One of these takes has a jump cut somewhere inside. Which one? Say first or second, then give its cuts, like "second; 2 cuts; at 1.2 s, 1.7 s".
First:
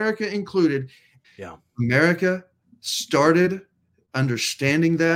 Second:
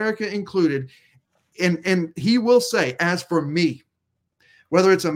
first; 1 cut; at 1.2 s